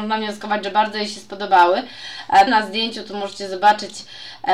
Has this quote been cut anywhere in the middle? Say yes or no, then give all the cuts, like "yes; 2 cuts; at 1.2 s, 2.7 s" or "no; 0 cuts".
yes; 1 cut; at 2.5 s